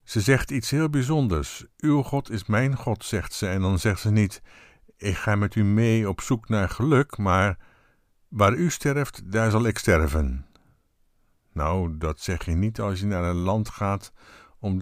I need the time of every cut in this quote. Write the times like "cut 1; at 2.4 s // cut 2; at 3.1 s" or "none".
none